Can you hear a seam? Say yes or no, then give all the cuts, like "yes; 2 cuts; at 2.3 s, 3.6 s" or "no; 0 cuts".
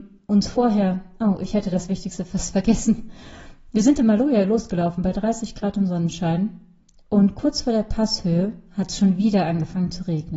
no; 0 cuts